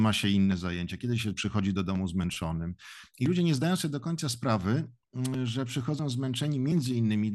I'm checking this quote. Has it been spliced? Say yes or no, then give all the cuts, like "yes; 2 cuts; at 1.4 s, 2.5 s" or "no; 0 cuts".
no; 0 cuts